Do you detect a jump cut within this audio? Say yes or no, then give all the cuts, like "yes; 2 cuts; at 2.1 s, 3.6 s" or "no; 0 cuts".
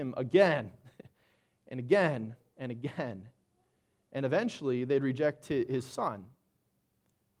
no; 0 cuts